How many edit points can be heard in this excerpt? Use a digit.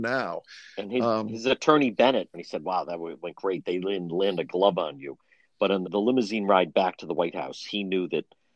2